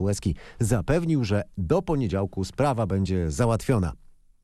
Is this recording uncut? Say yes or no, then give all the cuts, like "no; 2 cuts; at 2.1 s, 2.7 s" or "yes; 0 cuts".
yes; 0 cuts